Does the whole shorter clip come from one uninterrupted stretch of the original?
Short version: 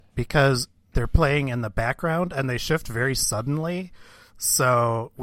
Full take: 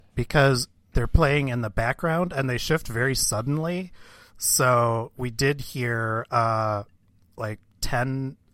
yes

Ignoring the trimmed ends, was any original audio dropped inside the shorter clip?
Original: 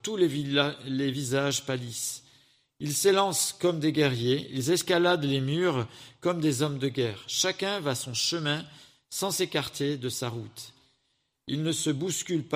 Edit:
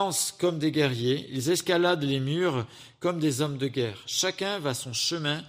no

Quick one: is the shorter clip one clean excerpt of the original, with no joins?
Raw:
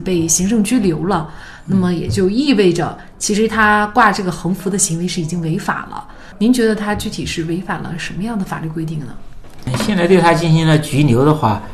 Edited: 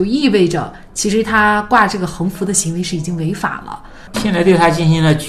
no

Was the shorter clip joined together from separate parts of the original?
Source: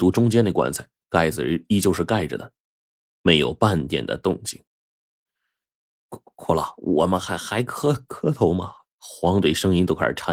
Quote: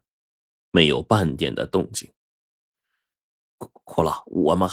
no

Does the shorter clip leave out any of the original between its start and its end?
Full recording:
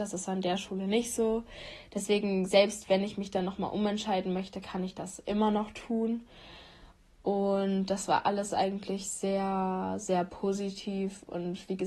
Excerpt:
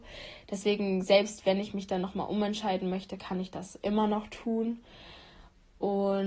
no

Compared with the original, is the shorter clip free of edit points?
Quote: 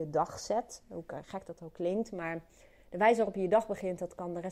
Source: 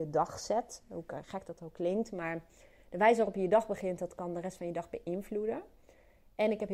yes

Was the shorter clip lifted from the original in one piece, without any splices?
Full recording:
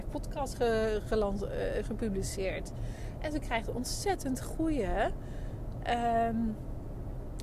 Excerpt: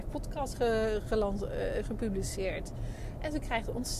yes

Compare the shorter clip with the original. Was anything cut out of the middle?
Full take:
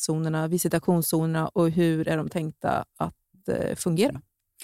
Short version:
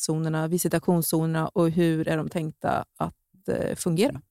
no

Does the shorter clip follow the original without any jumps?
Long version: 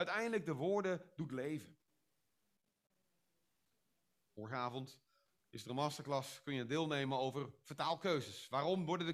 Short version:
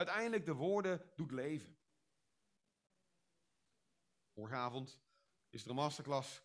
yes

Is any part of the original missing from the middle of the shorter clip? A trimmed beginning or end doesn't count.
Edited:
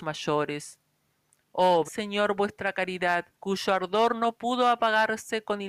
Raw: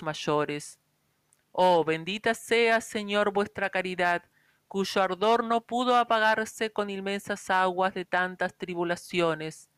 yes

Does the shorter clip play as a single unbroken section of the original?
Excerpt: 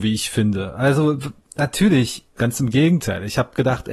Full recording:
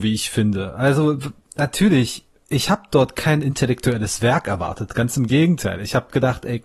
no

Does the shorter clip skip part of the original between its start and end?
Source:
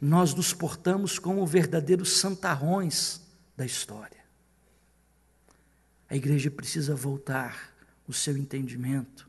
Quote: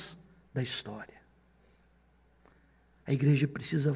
no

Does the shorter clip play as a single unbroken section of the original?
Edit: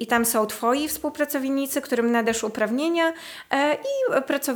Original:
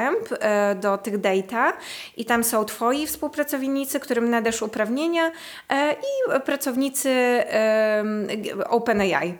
yes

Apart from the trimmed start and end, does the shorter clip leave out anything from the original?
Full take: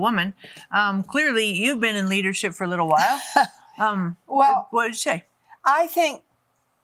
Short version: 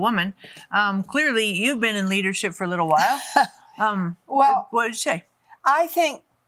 no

